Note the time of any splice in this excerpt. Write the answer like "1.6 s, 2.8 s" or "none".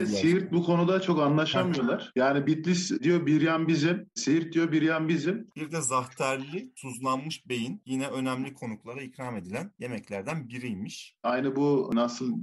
5.5 s, 11.2 s